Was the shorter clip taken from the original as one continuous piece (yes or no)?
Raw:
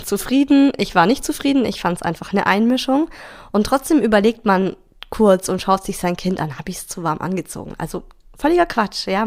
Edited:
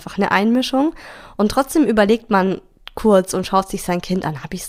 yes